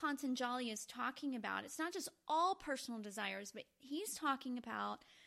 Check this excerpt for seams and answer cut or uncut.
uncut